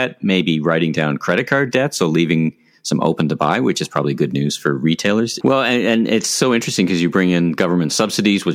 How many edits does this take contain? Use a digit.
1